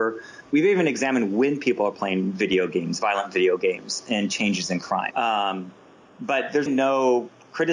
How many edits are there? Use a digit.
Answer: 2